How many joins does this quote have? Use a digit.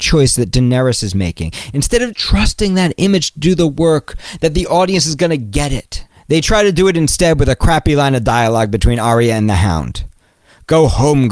1